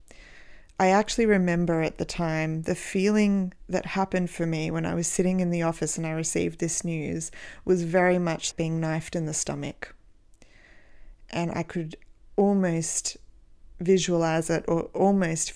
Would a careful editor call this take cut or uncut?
cut